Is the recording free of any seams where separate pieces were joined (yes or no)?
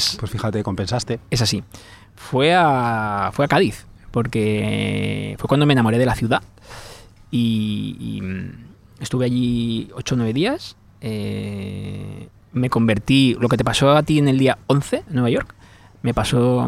yes